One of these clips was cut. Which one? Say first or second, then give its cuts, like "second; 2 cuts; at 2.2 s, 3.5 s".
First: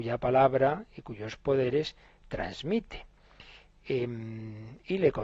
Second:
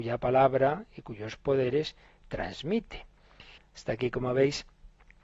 second; 1 cut; at 3.6 s